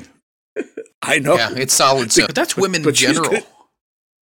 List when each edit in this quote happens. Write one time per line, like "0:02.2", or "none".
0:00.9
0:02.3